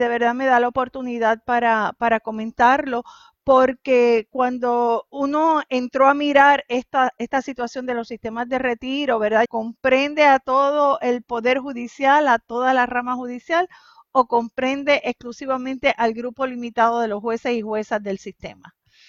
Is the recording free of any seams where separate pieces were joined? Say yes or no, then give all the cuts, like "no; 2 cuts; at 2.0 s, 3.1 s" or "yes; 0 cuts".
no; 1 cut; at 9.5 s